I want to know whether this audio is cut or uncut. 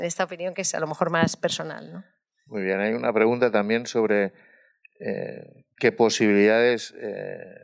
uncut